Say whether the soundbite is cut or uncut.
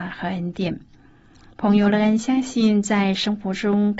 uncut